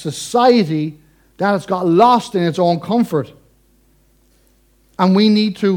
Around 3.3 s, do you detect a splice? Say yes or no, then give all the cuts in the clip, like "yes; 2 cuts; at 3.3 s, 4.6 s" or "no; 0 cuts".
no; 0 cuts